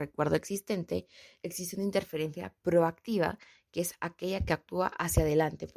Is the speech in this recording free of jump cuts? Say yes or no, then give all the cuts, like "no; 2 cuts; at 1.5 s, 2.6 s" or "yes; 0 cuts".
yes; 0 cuts